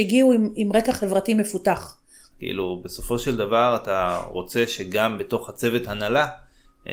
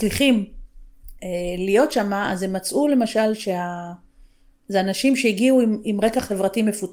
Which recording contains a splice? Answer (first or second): first